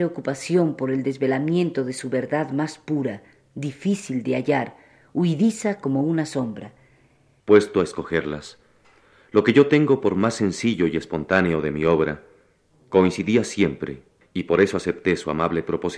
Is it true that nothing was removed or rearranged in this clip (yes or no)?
no